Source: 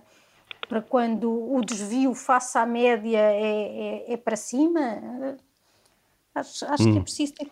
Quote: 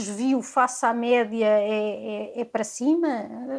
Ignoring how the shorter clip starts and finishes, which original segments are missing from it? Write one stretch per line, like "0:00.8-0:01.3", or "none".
none